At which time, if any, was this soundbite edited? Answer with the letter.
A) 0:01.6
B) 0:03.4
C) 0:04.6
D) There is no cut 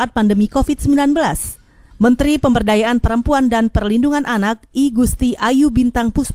D